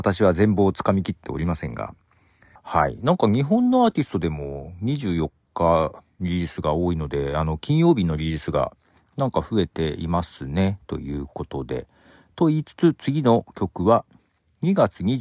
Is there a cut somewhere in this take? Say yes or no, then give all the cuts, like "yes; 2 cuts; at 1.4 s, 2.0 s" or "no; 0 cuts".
yes; 1 cut; at 2.6 s